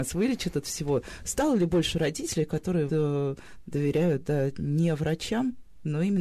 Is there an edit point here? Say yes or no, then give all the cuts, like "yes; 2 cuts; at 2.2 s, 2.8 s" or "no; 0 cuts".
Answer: yes; 1 cut; at 2.9 s